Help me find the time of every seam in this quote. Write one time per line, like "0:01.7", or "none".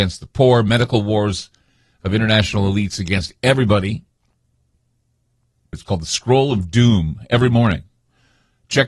0:05.7